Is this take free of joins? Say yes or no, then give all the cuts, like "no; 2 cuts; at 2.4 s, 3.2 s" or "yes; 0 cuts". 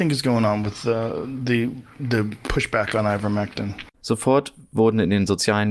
no; 1 cut; at 3.9 s